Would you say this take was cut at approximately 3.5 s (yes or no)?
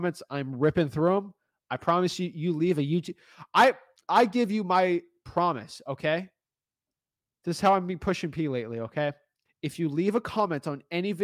no